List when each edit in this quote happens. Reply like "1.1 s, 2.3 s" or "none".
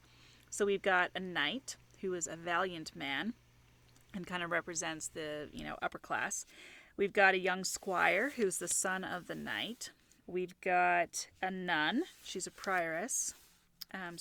5.8 s, 10.2 s

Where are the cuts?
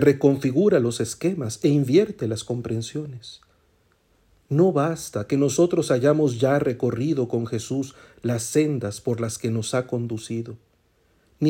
none

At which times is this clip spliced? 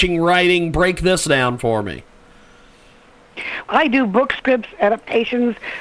3.6 s

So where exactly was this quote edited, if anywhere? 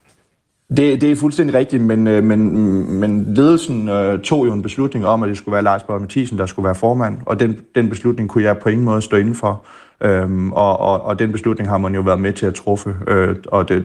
none

